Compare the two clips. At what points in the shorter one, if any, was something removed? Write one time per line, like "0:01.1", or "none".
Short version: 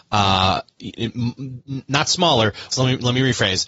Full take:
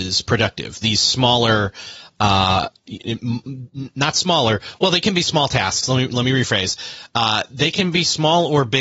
0:02.7